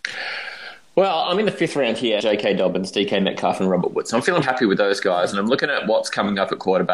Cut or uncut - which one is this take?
cut